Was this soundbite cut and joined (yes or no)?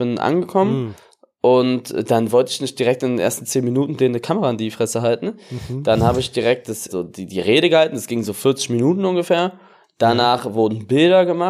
yes